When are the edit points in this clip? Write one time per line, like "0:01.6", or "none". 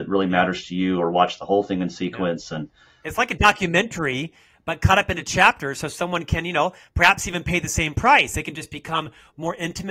none

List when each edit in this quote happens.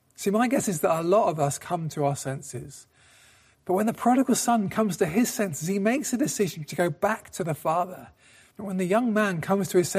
0:03.5
0:08.5

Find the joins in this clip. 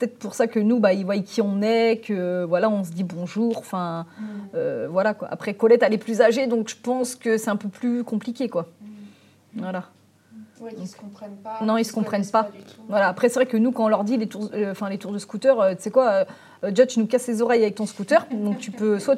none

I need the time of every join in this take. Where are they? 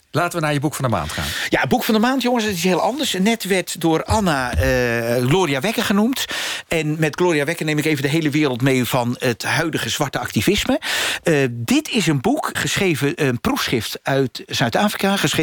0:12.5

